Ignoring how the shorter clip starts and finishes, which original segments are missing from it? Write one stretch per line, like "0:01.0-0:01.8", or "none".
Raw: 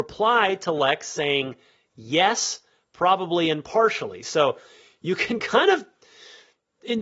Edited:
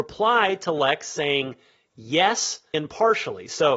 0:02.7-0:03.5